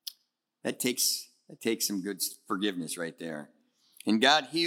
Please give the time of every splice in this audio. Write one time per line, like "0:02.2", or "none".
none